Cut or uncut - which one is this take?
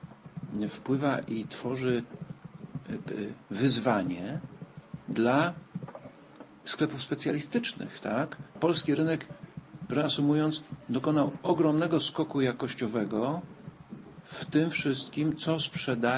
cut